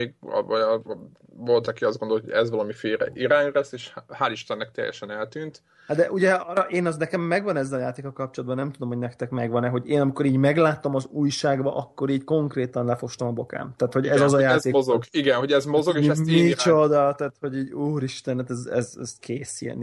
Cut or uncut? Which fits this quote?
uncut